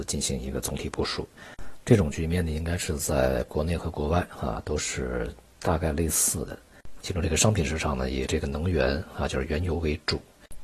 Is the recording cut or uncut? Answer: cut